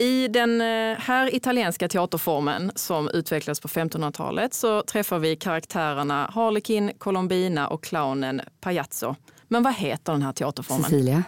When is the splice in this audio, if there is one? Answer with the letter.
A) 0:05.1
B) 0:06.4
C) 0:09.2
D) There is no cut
D